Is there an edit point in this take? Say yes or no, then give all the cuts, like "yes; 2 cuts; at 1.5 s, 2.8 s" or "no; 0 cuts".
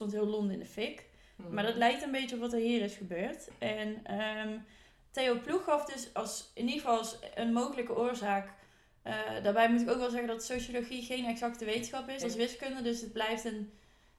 no; 0 cuts